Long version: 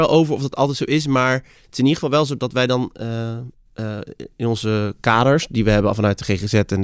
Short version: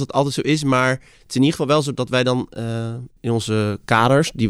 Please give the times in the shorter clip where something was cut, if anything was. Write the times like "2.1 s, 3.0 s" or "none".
3.2 s